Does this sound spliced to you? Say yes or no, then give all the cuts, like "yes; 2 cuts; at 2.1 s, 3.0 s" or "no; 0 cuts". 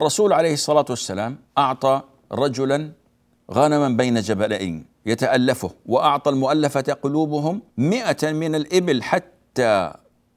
yes; 3 cuts; at 1.5 s, 4.9 s, 7.7 s